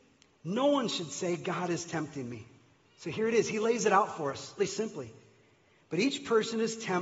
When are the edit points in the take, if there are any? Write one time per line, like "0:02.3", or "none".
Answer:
0:02.8
0:04.6